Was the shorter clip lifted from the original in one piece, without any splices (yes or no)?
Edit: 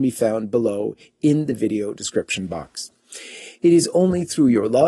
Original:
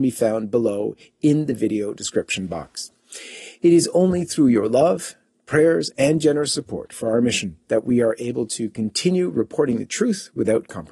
yes